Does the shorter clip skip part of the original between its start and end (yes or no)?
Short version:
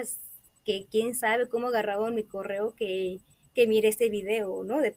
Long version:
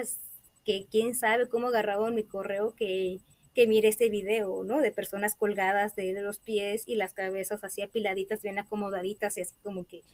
no